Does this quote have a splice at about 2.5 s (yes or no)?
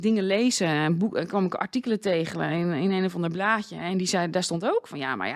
no